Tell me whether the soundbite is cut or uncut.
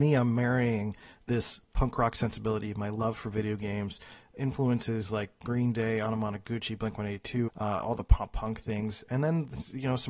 cut